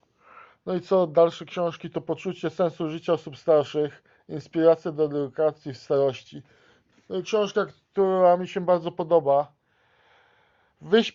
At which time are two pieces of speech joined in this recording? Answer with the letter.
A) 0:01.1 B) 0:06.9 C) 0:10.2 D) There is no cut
B